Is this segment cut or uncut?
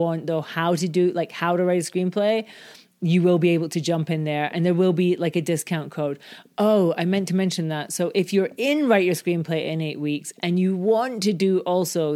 uncut